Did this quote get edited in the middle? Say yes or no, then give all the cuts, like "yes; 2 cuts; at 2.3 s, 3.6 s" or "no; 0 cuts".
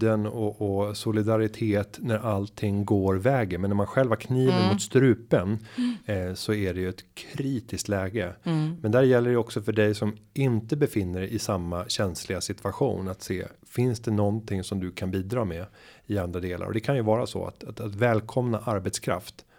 no; 0 cuts